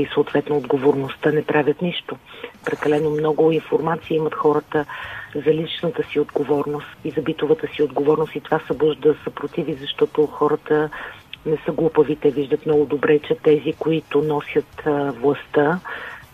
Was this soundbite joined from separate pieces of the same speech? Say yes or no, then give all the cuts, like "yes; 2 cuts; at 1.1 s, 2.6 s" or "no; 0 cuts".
yes; 2 cuts; at 2.6 s, 6.9 s